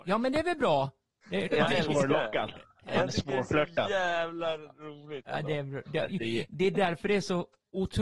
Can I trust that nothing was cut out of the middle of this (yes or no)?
no